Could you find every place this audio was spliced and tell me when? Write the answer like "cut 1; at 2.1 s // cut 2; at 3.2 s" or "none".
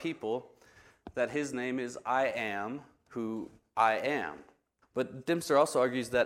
cut 1; at 4.8 s